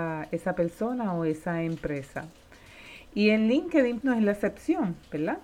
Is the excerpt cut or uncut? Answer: cut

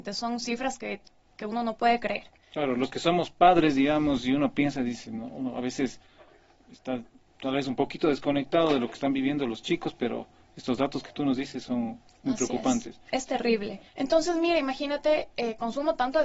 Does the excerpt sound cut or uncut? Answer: uncut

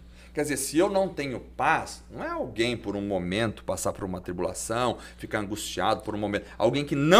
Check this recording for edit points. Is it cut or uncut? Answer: uncut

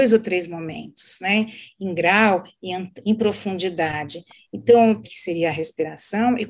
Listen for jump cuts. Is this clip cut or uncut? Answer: cut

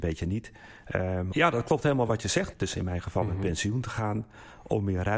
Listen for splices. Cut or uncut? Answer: cut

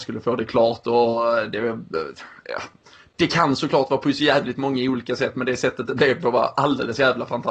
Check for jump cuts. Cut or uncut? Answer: uncut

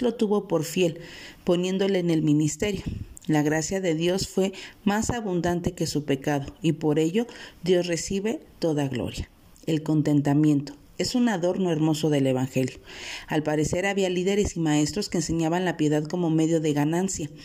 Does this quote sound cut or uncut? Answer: uncut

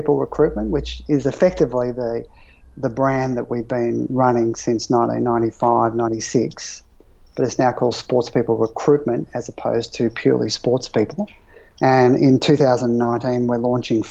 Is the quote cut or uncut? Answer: uncut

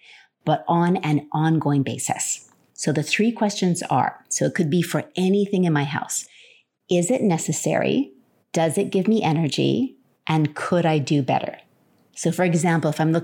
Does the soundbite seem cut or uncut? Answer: uncut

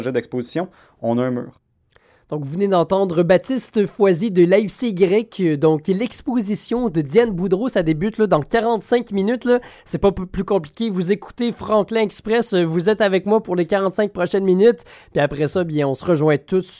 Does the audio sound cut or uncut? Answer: uncut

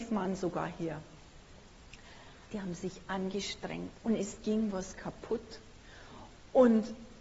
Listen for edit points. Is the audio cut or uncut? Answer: cut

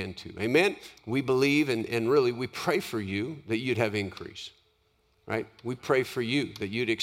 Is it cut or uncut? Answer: cut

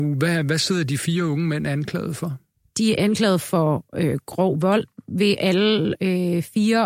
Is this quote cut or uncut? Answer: uncut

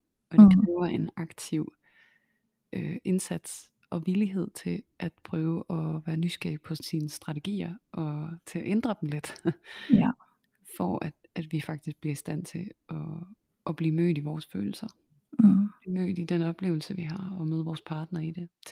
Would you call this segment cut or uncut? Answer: uncut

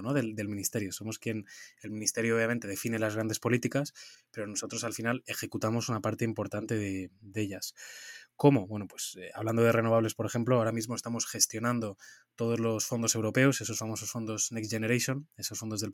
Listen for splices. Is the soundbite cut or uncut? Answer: uncut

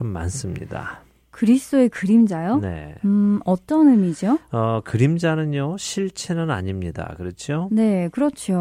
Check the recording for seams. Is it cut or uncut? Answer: uncut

